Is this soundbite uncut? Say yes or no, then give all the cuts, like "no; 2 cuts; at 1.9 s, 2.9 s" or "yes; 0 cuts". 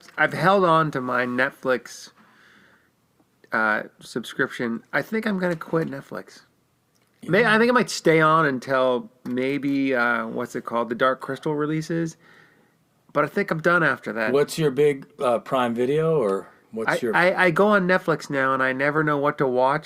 yes; 0 cuts